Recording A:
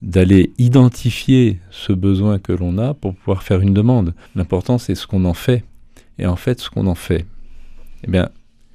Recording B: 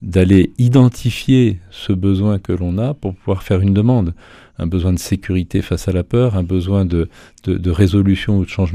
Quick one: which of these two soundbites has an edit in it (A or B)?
A